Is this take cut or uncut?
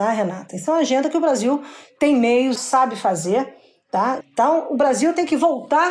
cut